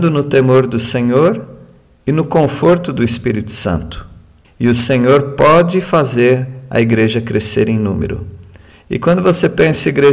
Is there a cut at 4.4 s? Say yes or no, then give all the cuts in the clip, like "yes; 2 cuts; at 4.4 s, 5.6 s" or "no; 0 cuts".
yes; 1 cut; at 4.4 s